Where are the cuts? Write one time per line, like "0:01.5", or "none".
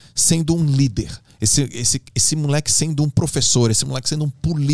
none